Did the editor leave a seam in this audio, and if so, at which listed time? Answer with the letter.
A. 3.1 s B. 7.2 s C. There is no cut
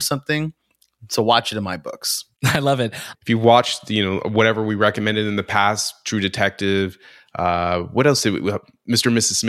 A